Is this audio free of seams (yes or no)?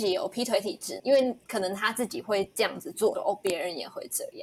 no